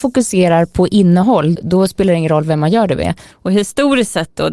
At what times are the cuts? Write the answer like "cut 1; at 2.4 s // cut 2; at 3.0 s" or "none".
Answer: cut 1; at 1.6 s // cut 2; at 3.3 s